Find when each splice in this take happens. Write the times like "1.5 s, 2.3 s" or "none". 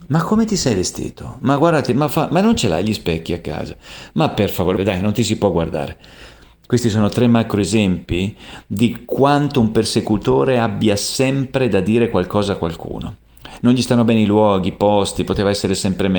4.8 s